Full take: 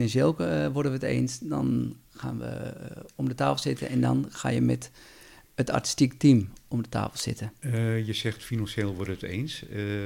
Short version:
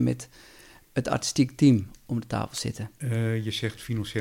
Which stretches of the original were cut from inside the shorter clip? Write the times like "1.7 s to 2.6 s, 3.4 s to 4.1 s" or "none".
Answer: none